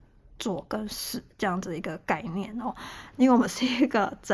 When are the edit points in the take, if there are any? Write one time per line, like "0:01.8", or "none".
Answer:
0:03.1